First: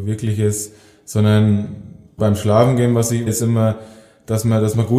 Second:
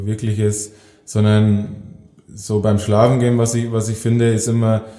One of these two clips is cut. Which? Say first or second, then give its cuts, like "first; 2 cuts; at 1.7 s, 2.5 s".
first; 2 cuts; at 2.2 s, 3.3 s